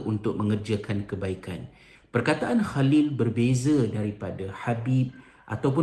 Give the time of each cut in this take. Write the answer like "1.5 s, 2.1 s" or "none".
2.0 s

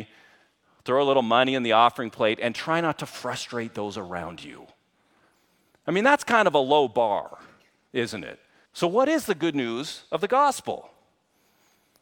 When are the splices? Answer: 8.7 s

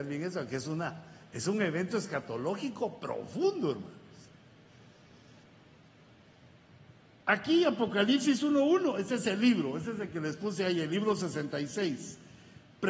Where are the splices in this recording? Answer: none

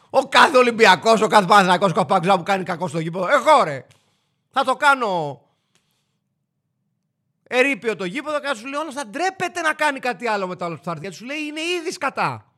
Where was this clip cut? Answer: none

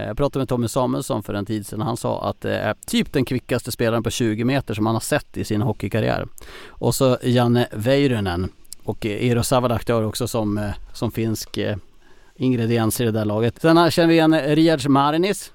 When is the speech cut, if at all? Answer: 13.5 s

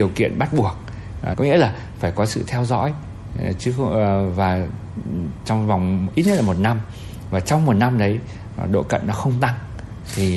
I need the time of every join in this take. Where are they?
1.3 s

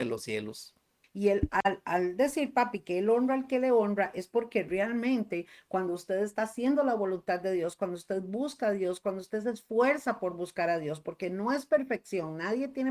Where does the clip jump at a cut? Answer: 1.0 s

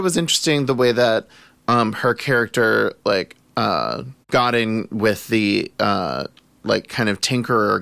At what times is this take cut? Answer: 4.2 s

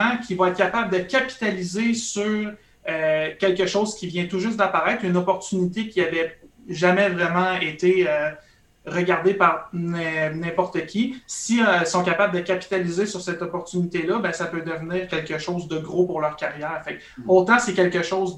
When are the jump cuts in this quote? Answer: none

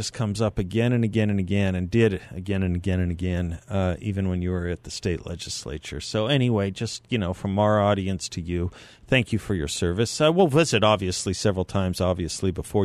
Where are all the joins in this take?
none

